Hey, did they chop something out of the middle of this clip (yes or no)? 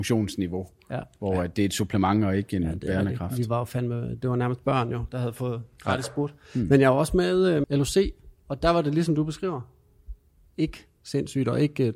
yes